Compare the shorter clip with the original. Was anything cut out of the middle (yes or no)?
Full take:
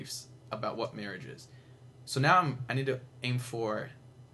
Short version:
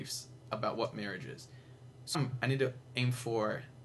yes